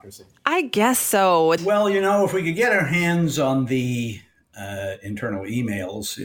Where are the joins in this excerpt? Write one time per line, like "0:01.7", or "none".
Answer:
0:01.6

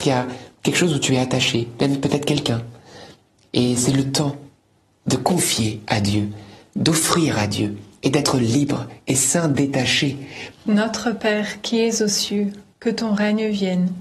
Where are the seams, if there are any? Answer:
0:10.5
0:12.7

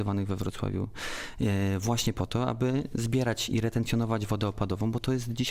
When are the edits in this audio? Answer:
none

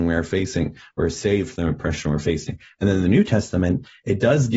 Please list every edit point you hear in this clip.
none

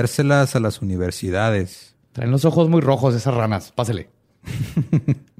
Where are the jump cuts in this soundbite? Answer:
none

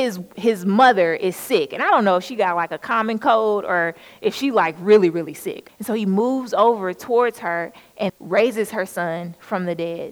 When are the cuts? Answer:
0:05.7
0:08.1

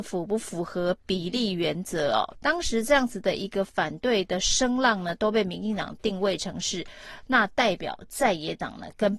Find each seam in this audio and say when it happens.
0:02.3

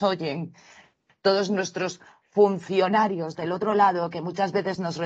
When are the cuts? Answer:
none

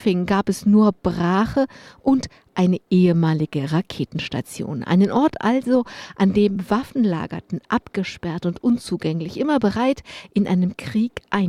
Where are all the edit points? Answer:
none

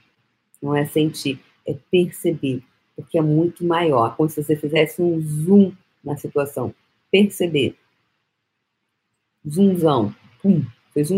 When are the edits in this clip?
none

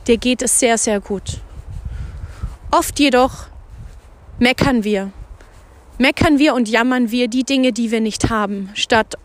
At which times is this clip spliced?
none

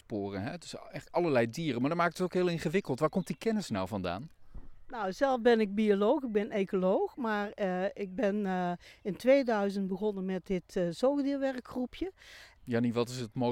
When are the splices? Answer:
0:12.5

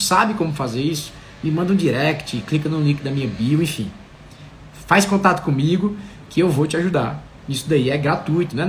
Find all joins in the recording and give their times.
none

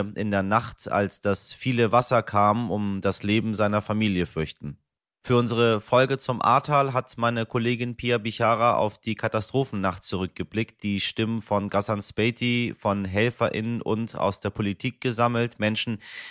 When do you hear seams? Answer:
none

